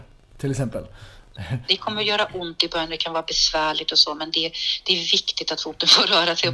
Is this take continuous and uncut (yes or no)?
no